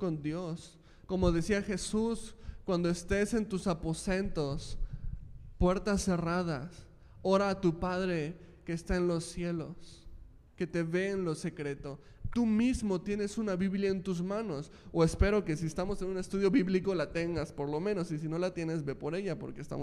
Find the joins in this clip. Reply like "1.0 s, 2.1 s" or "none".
1.1 s, 10.5 s, 12.3 s